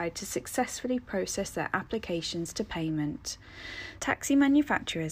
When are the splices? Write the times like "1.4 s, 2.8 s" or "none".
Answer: 4.0 s

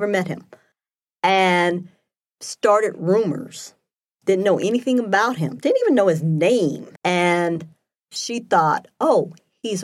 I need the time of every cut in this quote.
7.0 s

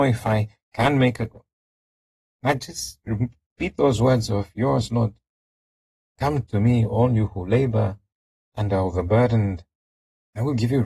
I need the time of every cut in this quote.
none

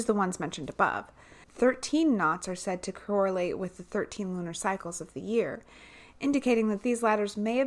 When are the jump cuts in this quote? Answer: 1.4 s

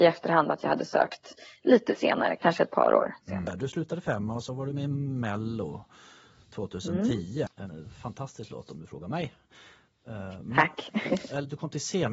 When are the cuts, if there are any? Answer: 7.5 s

